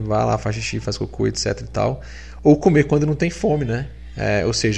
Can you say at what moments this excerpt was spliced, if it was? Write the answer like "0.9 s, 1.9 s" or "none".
none

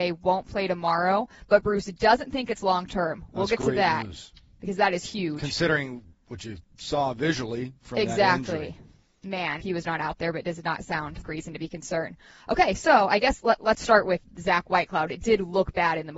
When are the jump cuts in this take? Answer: 9.6 s, 11.2 s

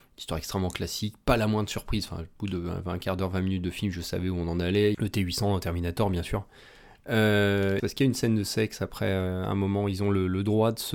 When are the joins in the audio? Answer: 4.9 s, 7.8 s

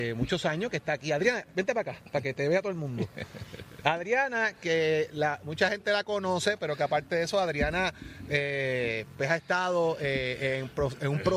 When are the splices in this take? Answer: none

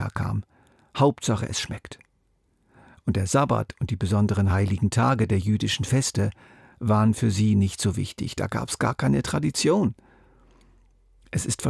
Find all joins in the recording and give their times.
none

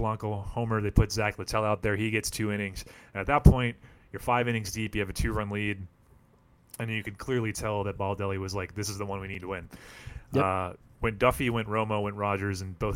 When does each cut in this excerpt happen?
none

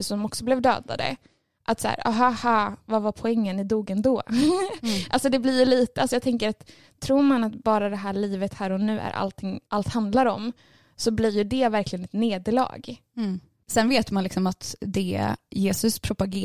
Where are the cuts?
9.7 s, 13.6 s

